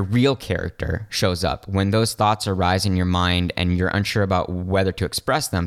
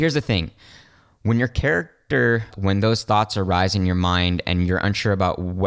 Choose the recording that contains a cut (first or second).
second